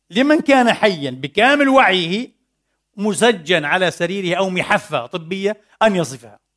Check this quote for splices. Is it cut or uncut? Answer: uncut